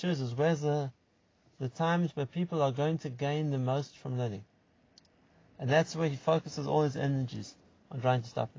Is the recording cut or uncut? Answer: uncut